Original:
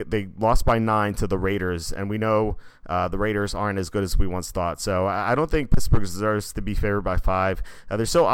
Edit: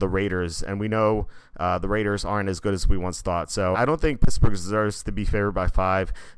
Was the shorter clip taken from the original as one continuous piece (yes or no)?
no